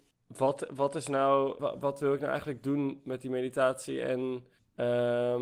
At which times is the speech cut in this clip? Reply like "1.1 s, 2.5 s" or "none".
1.6 s